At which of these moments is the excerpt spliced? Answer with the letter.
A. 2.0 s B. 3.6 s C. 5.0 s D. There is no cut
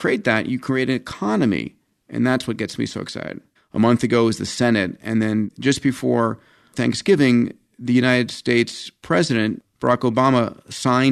B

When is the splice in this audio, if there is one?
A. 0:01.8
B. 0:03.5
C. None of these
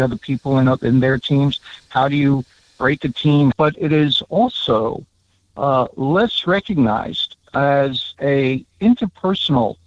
B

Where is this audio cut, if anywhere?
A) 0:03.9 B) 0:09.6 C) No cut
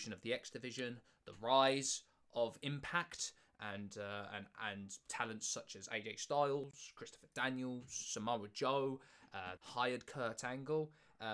B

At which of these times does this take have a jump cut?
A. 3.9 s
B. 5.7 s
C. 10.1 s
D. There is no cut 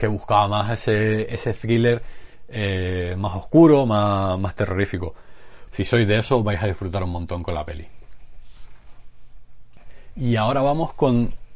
B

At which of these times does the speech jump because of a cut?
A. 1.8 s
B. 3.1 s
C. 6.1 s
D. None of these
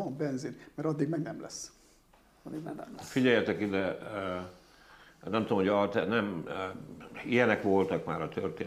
D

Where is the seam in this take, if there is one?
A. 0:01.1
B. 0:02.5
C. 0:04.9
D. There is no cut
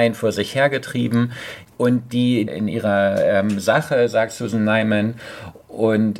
B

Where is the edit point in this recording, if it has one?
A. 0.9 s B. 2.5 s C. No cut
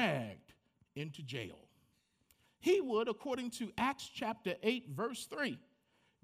B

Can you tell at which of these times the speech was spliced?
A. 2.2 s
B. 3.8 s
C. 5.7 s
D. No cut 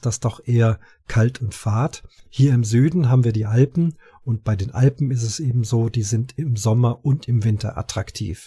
A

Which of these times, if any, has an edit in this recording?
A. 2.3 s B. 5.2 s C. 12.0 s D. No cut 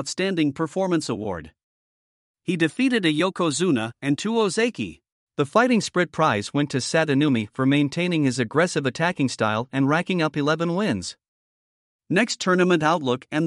B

